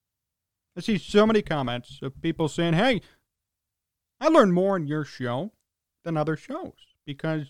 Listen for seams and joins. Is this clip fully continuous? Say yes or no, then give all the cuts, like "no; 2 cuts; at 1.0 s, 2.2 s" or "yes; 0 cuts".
yes; 0 cuts